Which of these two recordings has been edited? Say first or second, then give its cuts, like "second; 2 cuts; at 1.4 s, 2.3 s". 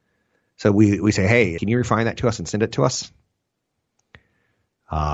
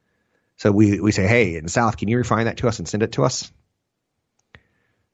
first; 1 cut; at 1.6 s